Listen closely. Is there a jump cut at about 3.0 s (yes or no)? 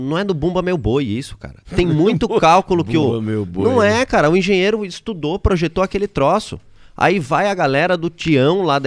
no